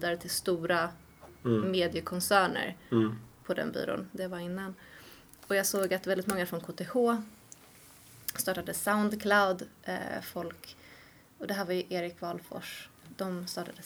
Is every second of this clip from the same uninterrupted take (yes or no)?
yes